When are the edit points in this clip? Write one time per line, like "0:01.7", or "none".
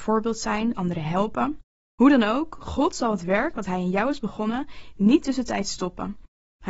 none